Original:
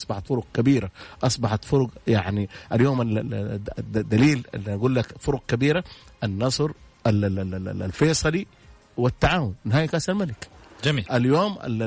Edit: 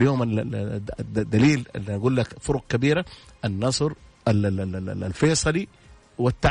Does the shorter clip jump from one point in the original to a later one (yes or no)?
no